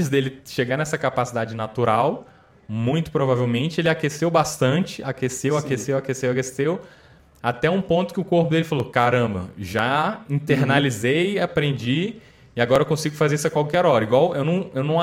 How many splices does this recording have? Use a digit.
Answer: 0